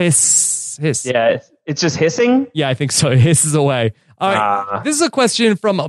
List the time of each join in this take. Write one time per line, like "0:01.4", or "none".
none